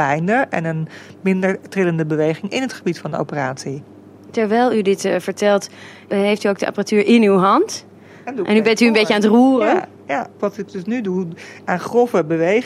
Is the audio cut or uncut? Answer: uncut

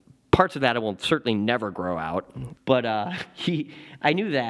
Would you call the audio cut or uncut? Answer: cut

